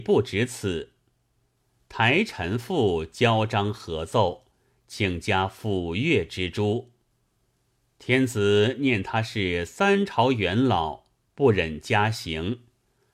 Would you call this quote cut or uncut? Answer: uncut